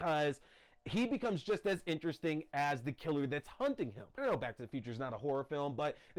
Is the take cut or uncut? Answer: cut